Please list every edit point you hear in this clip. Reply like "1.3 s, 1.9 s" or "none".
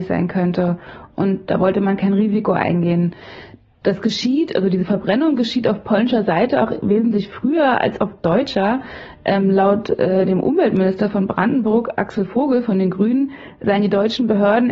13.6 s